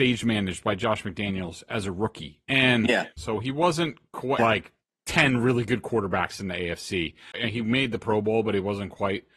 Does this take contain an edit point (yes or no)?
yes